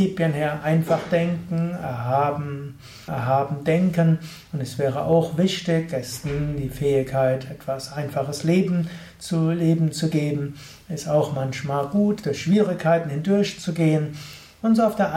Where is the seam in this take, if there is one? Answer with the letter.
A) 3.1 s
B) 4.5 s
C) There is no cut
A